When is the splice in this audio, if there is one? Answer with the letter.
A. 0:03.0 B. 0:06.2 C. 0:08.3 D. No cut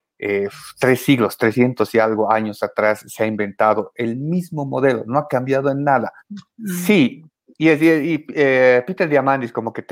B